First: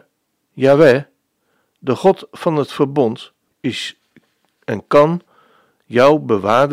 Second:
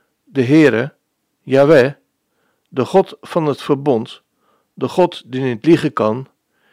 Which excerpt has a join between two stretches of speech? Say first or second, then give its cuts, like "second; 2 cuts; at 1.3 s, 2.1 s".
first; 1 cut; at 3.5 s